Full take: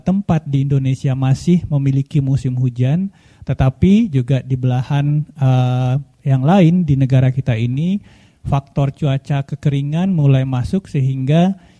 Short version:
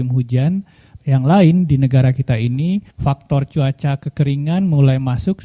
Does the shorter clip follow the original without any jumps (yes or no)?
no